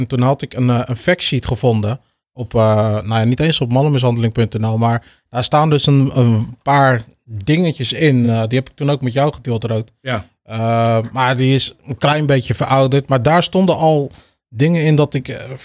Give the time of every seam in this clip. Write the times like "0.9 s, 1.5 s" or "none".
none